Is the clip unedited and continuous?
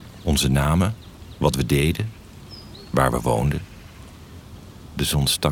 yes; 0 cuts

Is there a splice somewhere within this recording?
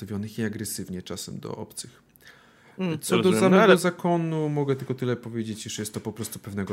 no; 0 cuts

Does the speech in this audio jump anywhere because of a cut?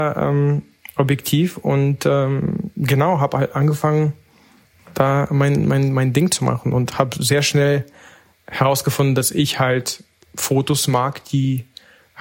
no; 0 cuts

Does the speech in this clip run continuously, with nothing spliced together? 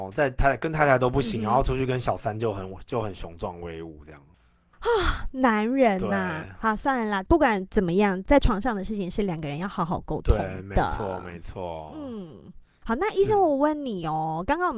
yes; 0 cuts

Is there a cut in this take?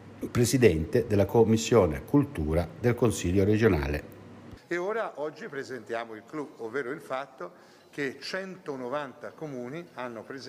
yes; 1 cut; at 4.6 s

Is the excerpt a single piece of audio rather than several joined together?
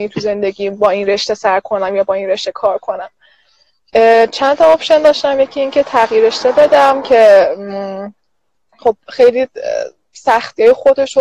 yes; 0 cuts

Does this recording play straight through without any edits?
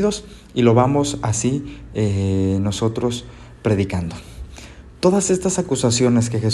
yes; 0 cuts

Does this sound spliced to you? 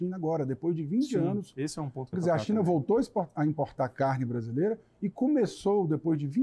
yes; 1 cut; at 2.1 s

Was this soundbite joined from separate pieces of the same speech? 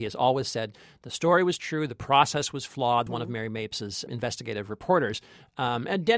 yes; 2 cuts; at 3.1 s, 4.1 s

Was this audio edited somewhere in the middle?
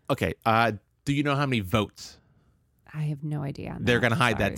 no; 0 cuts

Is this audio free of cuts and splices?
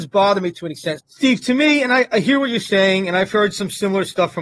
no; 1 cut; at 1.0 s

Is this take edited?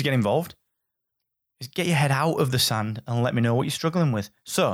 no; 0 cuts

